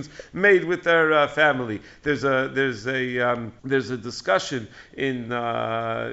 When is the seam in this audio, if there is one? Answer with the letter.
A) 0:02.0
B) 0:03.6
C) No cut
B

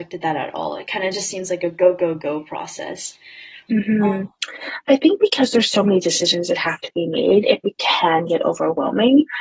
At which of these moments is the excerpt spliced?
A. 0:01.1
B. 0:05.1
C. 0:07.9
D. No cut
D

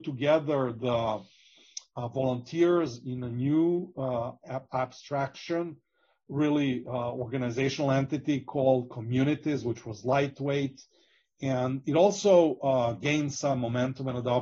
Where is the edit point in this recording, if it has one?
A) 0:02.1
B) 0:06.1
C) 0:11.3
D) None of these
D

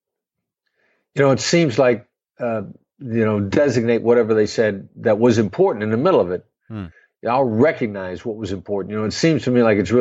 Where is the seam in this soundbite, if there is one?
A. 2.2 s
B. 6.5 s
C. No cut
A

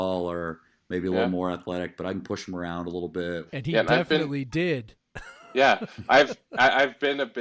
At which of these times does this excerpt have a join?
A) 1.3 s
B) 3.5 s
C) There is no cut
B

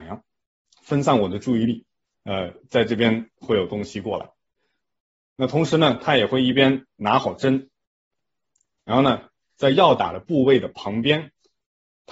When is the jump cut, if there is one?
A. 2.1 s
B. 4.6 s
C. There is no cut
A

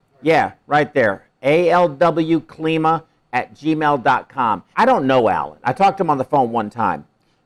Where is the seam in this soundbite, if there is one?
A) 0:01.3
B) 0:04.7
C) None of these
B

